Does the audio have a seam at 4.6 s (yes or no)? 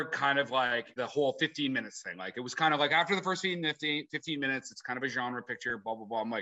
no